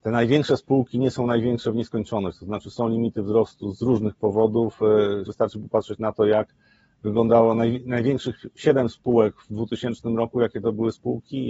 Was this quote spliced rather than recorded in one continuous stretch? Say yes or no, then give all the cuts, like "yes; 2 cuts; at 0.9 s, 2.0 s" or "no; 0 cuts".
yes; 1 cut; at 5.3 s